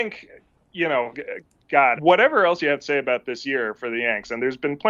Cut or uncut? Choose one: cut